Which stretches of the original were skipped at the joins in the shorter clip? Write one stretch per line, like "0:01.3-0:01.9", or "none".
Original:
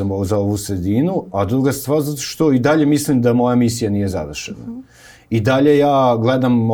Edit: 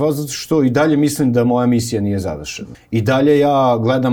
0:04.6-0:05.1